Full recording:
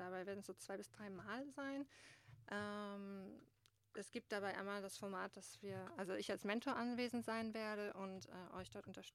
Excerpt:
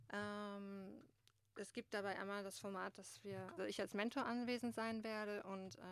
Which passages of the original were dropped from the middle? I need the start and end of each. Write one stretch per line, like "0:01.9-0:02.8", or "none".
0:05.9-0:06.1